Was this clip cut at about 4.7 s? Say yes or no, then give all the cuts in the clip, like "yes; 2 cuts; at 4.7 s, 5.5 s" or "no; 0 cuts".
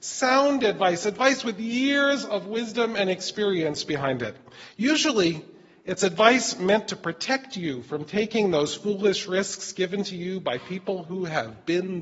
no; 0 cuts